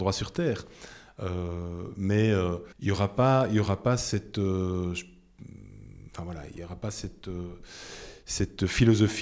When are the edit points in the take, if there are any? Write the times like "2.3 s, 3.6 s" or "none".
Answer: 2.7 s